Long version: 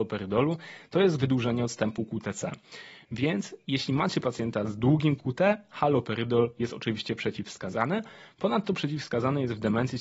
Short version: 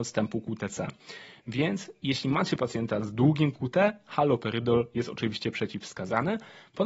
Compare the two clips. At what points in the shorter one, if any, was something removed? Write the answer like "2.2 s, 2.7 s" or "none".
none